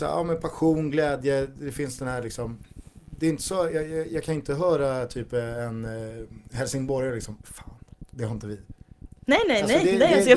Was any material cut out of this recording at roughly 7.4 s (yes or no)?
yes